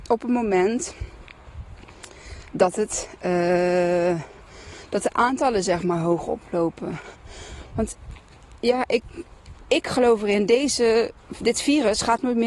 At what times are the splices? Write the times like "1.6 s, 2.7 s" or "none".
none